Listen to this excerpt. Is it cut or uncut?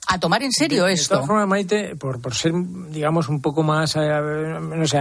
uncut